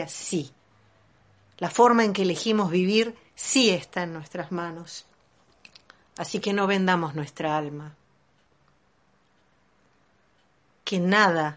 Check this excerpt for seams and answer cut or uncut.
uncut